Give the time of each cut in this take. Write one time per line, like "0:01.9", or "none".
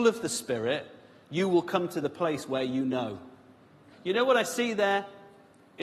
0:03.9